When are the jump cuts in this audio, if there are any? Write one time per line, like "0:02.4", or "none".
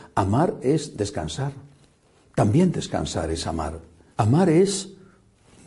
0:04.1